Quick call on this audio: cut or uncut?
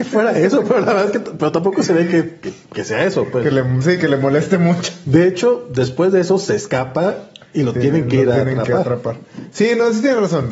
uncut